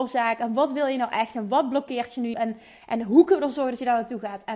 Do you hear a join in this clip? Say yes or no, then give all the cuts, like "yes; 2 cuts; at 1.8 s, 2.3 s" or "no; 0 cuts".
yes; 1 cut; at 2.3 s